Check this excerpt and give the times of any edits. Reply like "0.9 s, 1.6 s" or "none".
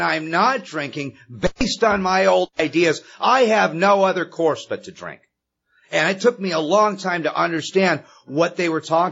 none